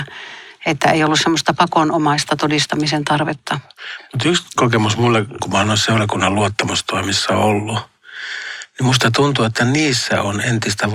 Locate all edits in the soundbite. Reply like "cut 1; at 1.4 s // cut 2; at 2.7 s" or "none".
cut 1; at 5.4 s